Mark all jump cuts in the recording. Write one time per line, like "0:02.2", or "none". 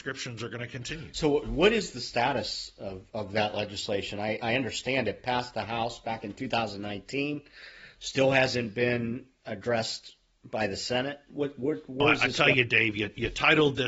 none